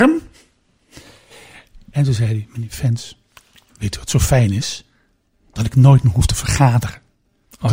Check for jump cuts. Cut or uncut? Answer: uncut